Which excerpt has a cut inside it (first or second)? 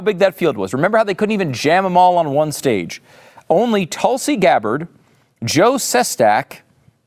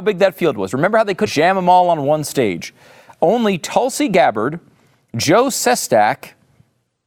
second